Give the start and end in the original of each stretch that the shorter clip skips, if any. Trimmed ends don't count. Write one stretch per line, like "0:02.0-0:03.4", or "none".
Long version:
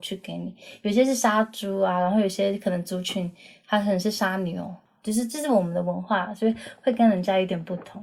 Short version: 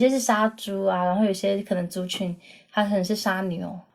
none